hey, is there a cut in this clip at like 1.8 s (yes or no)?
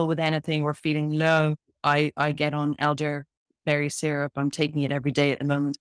no